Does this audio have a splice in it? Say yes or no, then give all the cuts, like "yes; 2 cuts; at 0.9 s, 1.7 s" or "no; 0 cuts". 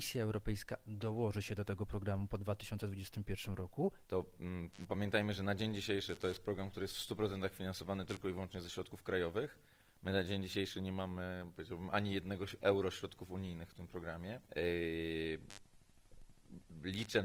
yes; 2 cuts; at 4.0 s, 14.4 s